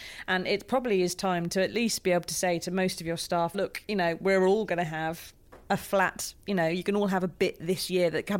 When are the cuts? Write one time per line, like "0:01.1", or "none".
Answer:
0:03.5